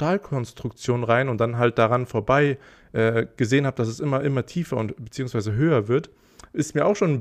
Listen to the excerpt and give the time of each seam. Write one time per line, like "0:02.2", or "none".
none